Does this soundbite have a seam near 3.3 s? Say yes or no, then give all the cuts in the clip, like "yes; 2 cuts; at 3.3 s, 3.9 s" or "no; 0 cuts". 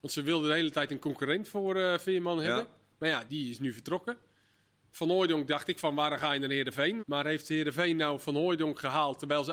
yes; 2 cuts; at 3.3 s, 7.0 s